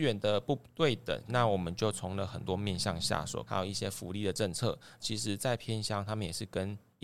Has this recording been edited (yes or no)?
yes